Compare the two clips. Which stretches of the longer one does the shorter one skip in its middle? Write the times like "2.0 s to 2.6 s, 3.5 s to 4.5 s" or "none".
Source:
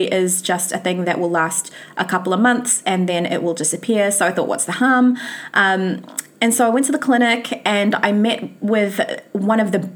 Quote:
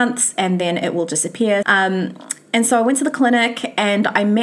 4.1 s to 5.5 s